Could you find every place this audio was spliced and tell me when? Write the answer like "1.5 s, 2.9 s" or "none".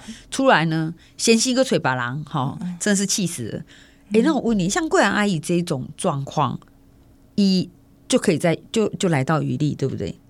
none